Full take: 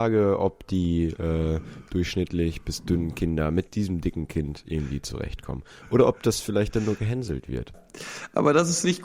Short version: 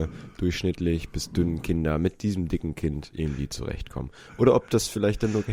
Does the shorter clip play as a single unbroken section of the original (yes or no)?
yes